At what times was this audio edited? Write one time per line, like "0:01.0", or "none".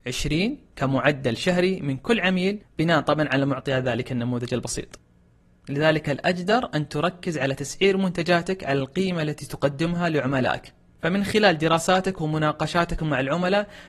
0:05.6